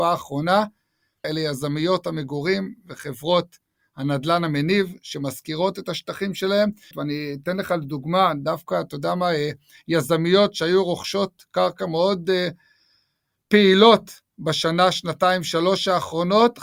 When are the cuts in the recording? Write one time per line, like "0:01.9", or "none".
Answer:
0:01.2
0:06.9